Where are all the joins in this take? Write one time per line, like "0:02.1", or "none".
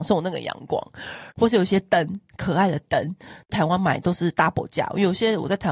0:01.3